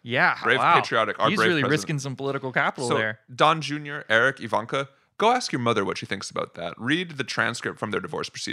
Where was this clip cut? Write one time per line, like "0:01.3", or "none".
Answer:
none